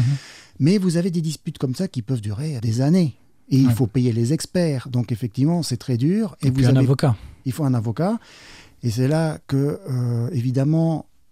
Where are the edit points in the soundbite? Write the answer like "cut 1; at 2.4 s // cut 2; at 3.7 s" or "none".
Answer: cut 1; at 2.6 s